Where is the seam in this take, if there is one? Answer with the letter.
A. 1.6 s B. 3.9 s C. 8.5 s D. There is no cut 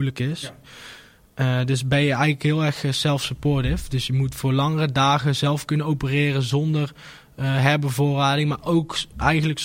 D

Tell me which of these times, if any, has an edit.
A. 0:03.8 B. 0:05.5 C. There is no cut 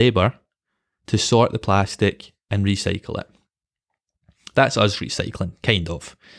C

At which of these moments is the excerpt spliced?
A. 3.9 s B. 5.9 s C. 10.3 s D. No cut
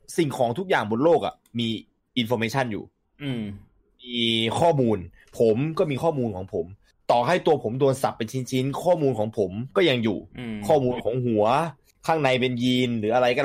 C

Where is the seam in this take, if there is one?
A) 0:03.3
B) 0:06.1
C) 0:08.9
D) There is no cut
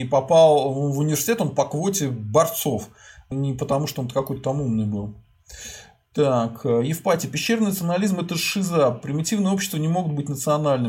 A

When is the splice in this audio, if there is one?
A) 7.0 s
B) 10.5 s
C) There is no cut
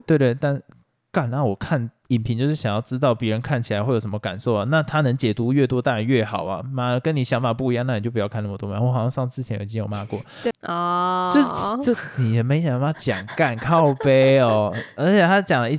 B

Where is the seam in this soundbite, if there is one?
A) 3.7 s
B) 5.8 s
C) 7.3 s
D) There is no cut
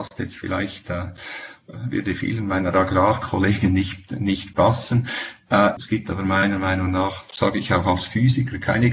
B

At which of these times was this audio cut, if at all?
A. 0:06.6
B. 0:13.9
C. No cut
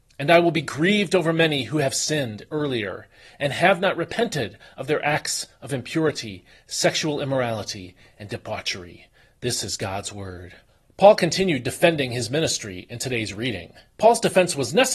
B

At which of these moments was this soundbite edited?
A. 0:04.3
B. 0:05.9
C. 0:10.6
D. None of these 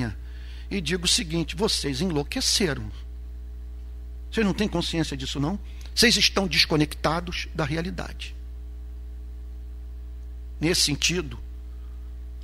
D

